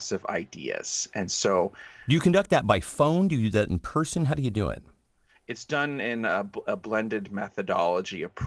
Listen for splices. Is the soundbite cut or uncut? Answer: uncut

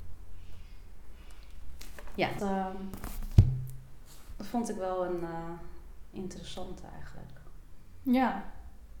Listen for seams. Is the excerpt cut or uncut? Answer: cut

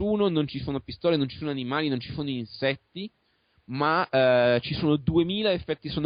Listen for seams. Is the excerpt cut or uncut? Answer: uncut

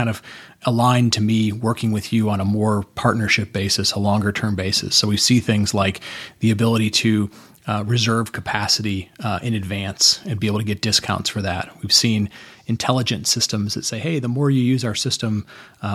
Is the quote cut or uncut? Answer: uncut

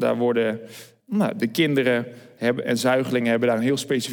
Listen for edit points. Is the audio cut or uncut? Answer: cut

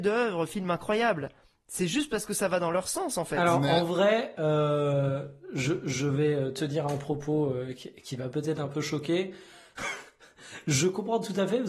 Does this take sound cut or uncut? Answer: uncut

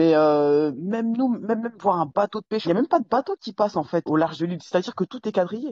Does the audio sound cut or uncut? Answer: cut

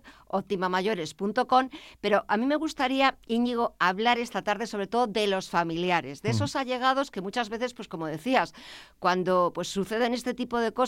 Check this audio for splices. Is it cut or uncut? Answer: uncut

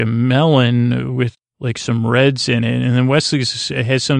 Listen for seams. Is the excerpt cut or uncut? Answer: cut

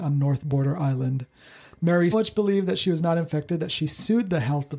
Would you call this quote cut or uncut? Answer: cut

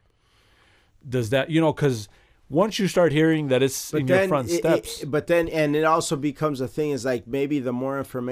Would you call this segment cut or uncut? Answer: uncut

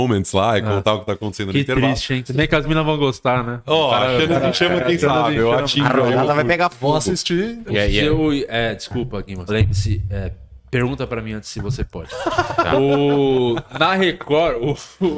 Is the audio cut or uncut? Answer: cut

